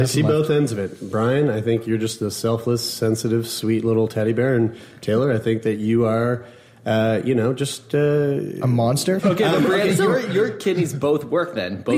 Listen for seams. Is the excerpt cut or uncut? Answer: cut